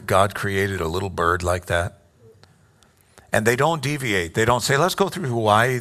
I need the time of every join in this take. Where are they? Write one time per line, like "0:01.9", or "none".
none